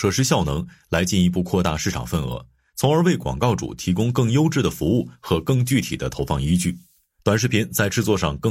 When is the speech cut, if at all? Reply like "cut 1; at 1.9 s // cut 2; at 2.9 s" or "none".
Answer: cut 1; at 7.2 s